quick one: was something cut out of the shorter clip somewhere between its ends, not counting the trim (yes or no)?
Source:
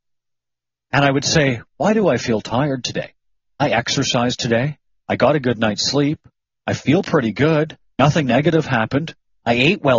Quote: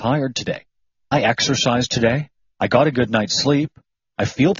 no